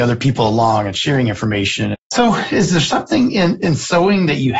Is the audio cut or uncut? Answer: cut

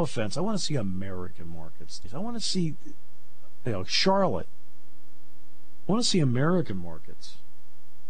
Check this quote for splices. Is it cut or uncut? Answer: cut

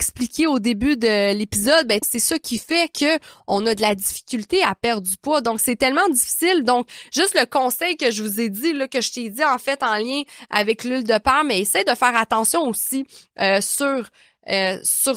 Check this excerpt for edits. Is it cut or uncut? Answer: cut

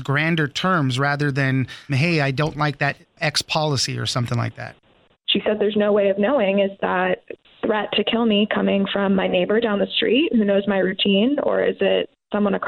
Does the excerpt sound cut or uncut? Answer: cut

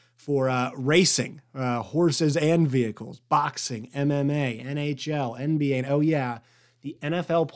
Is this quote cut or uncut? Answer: uncut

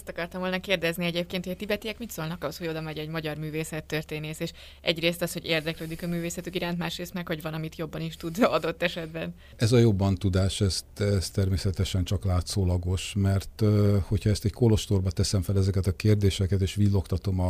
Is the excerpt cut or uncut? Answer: uncut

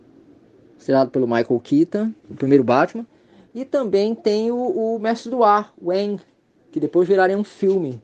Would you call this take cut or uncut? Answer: uncut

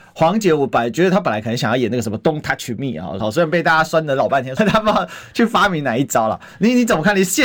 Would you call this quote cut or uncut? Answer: cut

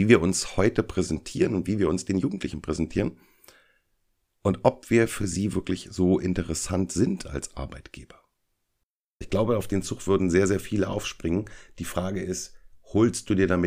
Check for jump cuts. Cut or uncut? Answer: cut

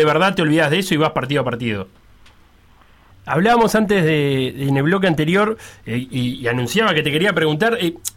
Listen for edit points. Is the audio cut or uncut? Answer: cut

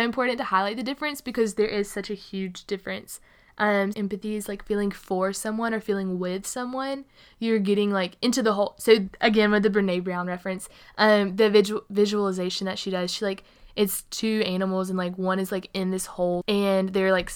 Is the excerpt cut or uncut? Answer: cut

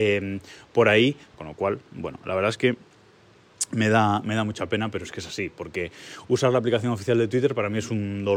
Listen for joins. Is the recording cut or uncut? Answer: cut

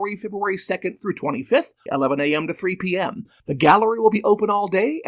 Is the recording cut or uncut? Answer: cut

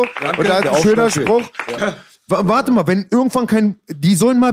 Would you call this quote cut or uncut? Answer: cut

